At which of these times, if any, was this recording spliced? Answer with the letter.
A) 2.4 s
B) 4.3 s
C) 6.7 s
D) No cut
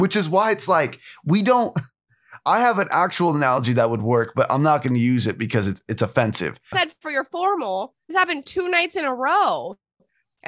C